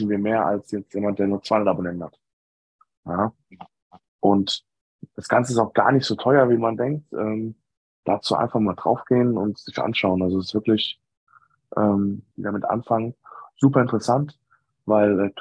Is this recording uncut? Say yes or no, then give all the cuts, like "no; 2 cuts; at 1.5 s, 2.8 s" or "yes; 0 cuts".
no; 1 cut; at 12.3 s